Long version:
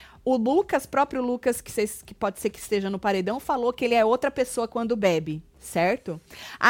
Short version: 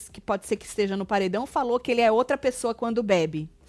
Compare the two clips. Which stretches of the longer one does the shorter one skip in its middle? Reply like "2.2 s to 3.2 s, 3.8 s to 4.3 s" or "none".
none